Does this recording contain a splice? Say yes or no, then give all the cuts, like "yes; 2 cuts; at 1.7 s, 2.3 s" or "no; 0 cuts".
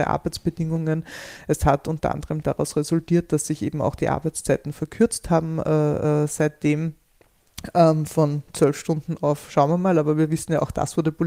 no; 0 cuts